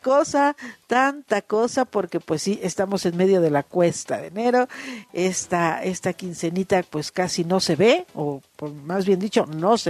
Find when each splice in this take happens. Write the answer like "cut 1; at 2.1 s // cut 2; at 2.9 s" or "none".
none

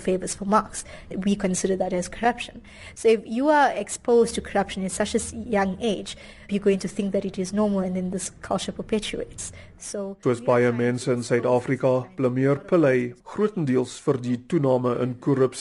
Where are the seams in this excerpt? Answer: cut 1; at 6.5 s // cut 2; at 10.2 s // cut 3; at 13.2 s

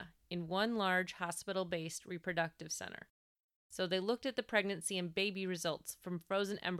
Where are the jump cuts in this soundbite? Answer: cut 1; at 3.6 s

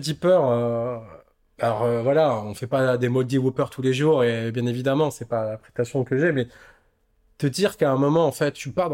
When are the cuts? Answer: none

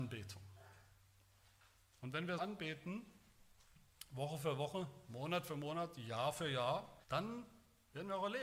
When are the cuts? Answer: cut 1; at 2.4 s // cut 2; at 7.0 s

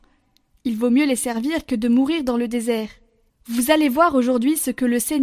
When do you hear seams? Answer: cut 1; at 3.3 s

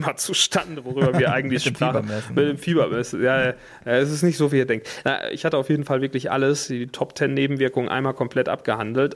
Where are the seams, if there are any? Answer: none

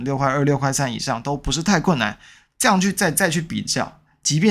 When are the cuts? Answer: none

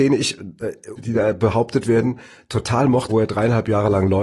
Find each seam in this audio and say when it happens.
cut 1; at 1.0 s // cut 2; at 3.1 s

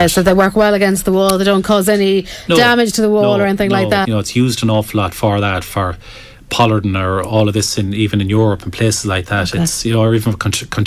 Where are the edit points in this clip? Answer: cut 1; at 4.0 s

